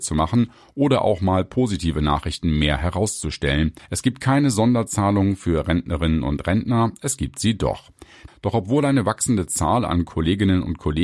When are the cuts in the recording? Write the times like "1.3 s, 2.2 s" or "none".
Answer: 3.8 s, 8.3 s